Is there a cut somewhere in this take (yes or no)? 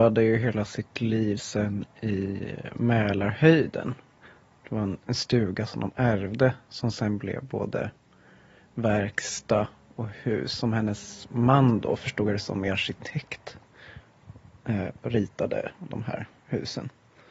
no